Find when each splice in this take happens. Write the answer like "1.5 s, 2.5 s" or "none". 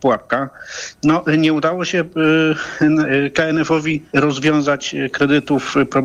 4.1 s